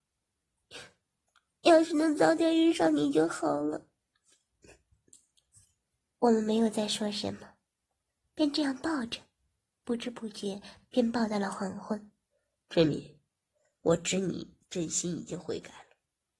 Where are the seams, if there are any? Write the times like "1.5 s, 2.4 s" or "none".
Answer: 12.6 s